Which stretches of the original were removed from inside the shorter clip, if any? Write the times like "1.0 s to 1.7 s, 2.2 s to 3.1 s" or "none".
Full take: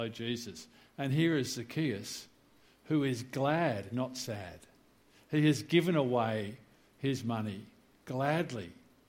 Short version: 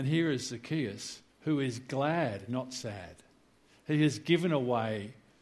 2.4 s to 2.7 s

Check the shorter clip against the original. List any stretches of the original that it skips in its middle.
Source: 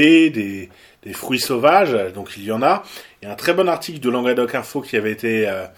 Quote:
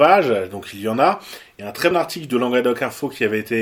3.5 s to 3.6 s

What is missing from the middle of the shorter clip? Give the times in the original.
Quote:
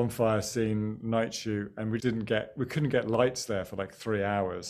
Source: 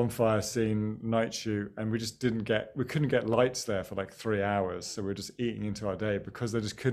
2.0 s to 2.2 s

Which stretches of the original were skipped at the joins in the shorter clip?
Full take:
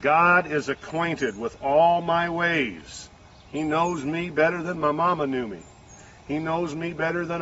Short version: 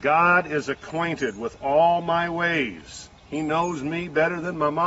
3.2 s to 3.4 s

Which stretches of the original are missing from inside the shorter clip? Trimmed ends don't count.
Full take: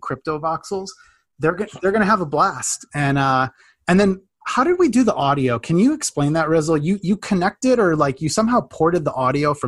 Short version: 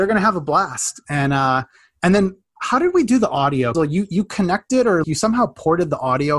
5.6 s to 6.7 s, 8.0 s to 8.2 s

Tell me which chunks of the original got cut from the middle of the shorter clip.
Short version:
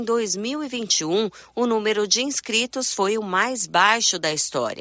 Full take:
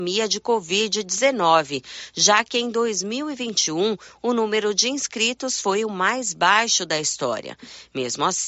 none

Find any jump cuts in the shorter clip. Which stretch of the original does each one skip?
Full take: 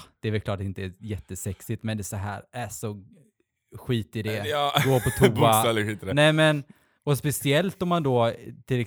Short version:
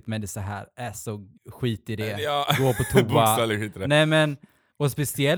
3.1 s to 3.6 s

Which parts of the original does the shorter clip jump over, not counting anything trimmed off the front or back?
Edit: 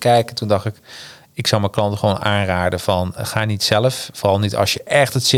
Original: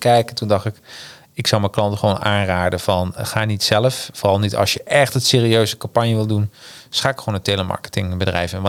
none

